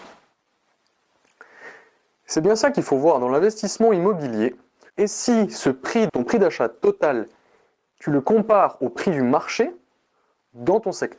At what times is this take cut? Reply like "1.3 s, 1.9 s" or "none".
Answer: 4.9 s, 6.1 s